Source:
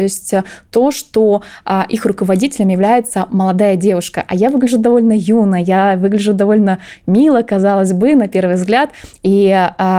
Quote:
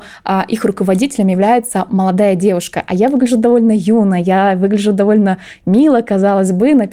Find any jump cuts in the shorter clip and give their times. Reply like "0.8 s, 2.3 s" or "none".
none